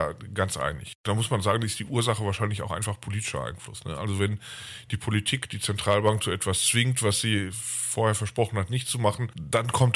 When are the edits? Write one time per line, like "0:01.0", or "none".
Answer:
none